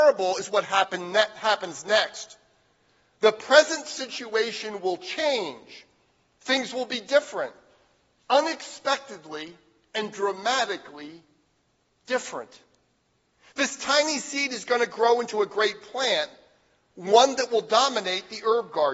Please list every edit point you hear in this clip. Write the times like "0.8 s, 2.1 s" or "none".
none